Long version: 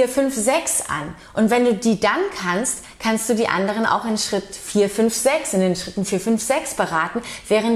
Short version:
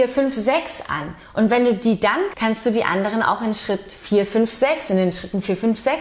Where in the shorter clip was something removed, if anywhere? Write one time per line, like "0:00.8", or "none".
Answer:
0:02.3